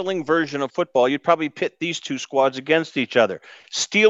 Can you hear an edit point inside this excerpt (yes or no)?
no